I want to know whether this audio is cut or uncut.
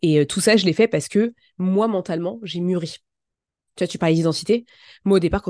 uncut